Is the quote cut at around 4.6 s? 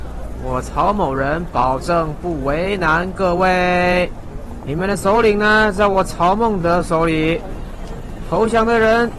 yes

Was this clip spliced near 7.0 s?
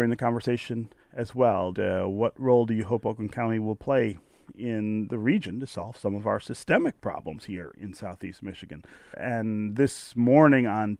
no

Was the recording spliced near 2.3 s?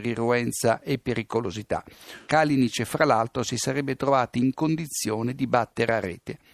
yes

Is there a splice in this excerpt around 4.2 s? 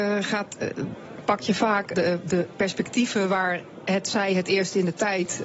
no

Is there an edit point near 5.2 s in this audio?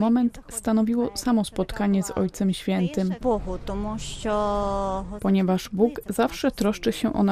yes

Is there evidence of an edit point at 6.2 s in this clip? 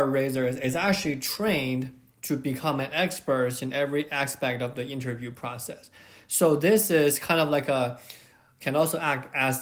no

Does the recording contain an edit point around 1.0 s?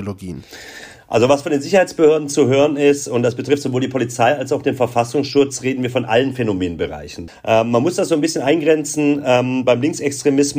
no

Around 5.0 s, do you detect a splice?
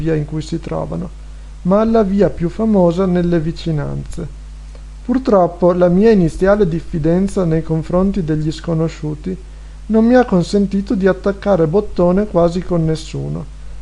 yes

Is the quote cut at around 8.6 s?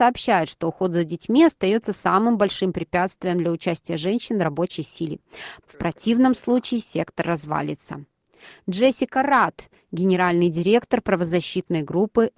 no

